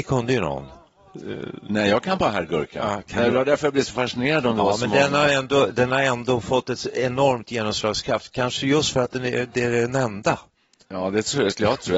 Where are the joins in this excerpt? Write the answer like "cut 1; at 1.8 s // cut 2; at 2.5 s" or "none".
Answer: none